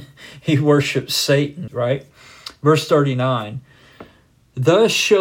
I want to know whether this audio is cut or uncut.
cut